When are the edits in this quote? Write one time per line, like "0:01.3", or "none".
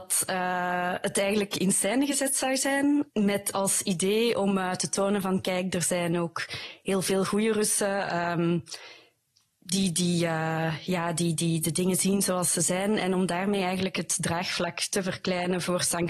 none